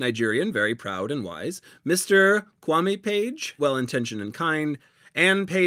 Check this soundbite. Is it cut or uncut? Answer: cut